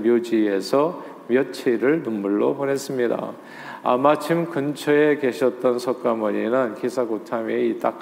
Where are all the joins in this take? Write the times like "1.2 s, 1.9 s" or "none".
none